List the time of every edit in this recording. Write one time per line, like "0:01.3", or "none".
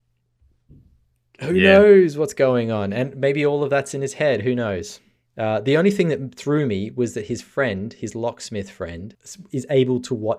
none